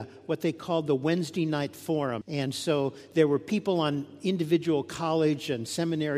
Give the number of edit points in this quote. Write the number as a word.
one